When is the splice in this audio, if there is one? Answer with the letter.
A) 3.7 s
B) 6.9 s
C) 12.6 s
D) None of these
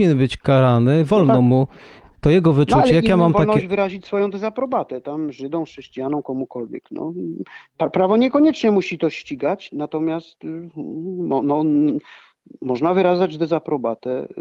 D